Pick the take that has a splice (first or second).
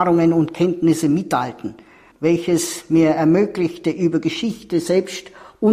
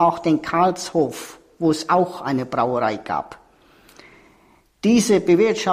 first